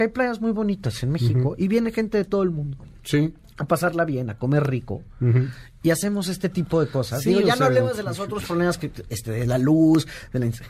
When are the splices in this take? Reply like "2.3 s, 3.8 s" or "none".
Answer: none